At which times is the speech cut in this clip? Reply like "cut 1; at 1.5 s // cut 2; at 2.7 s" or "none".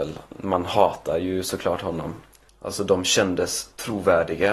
cut 1; at 2.5 s

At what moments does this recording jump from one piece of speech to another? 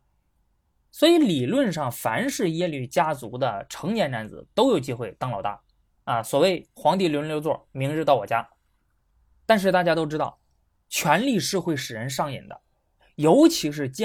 none

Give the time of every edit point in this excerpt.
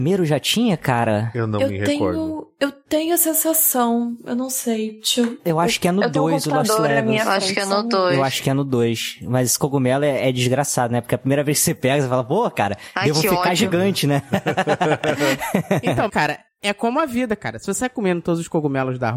cut 1; at 16.1 s

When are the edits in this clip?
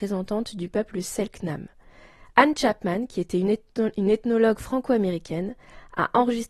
none

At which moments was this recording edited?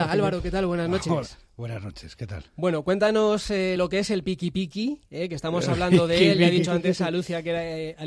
none

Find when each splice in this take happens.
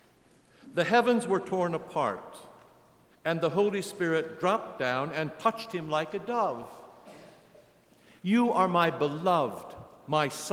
cut 1; at 8.2 s

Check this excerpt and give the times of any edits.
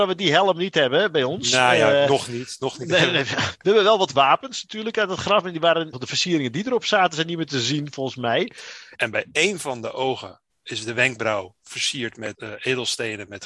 cut 1; at 5.9 s // cut 2; at 8.9 s

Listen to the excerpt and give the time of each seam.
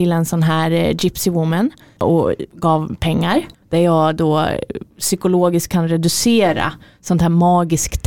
cut 1; at 3.6 s // cut 2; at 4.9 s

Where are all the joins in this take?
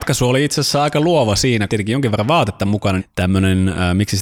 cut 1; at 1.7 s // cut 2; at 3.0 s

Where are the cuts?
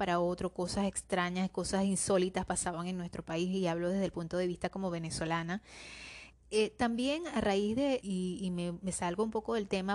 cut 1; at 6.3 s // cut 2; at 8.0 s

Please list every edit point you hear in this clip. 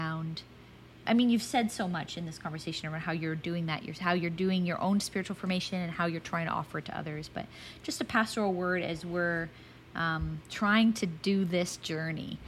cut 1; at 1.0 s

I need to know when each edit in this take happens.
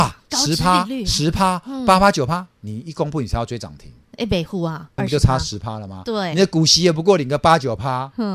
cut 1; at 5.0 s

